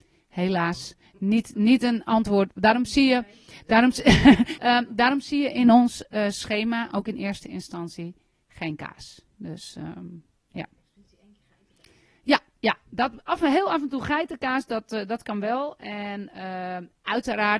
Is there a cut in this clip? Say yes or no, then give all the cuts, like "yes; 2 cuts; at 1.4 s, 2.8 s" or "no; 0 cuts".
yes; 1 cut; at 4.6 s